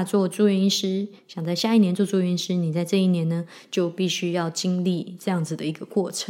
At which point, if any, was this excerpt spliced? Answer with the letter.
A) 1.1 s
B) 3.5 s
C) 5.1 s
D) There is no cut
D